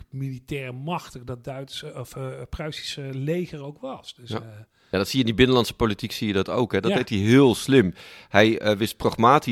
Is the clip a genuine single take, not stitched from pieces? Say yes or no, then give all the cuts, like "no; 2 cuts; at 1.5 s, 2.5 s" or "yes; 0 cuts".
yes; 0 cuts